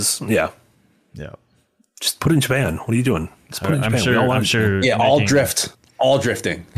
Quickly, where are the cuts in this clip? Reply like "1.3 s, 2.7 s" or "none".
none